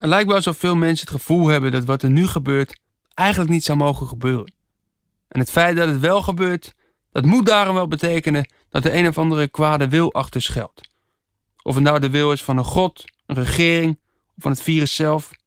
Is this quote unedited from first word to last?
yes; 0 cuts

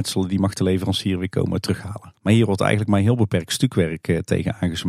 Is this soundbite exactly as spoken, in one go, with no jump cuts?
no; 1 cut; at 2.1 s

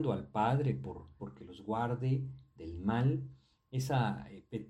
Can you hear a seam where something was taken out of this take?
yes; 1 cut; at 1.2 s

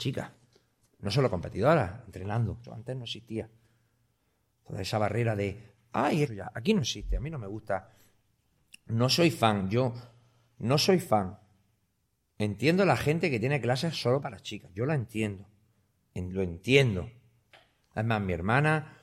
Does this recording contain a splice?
yes; 2 cuts; at 2.6 s, 6.3 s

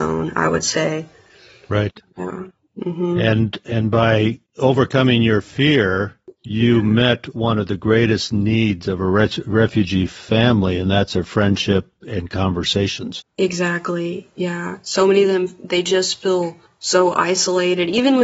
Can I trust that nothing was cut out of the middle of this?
yes; 0 cuts

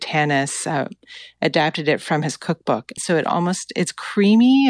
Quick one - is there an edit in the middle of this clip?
yes; 1 cut; at 3.0 s

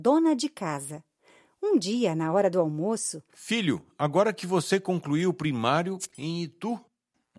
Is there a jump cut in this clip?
yes; 2 cuts; at 3.3 s, 6.1 s

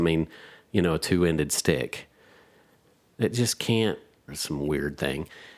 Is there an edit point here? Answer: yes; 1 cut; at 4.3 s

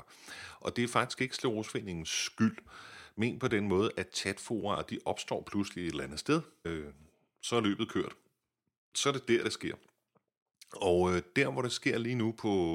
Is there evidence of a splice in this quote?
yes; 1 cut; at 6.6 s

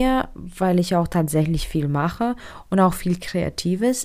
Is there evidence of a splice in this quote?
no; 0 cuts

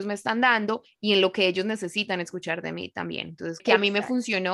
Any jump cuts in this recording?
yes; 1 cut; at 3.6 s

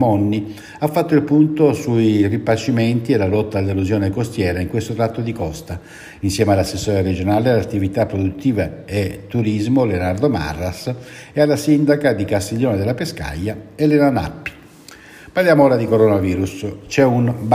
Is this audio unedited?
yes; 0 cuts

